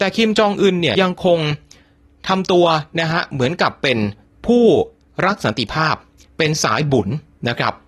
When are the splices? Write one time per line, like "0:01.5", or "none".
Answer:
0:00.9